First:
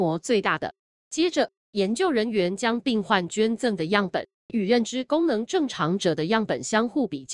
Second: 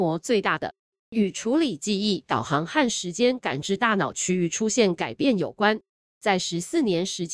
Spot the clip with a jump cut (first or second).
second